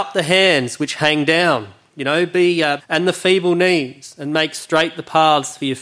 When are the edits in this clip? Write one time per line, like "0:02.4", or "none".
0:02.8